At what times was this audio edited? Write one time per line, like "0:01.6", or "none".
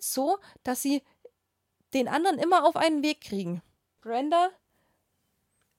0:04.0